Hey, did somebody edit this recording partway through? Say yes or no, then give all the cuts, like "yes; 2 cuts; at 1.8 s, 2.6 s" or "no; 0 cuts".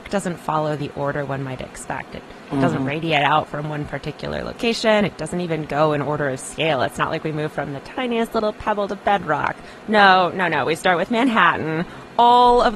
no; 0 cuts